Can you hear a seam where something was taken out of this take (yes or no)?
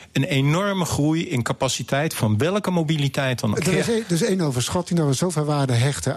yes